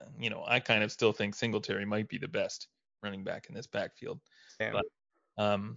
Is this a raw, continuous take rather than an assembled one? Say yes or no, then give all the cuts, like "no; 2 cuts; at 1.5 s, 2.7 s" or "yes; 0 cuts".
yes; 0 cuts